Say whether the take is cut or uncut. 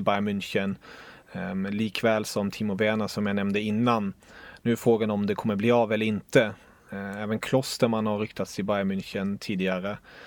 uncut